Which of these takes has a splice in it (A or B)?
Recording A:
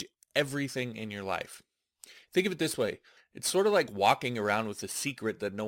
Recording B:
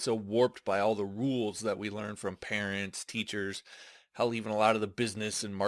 A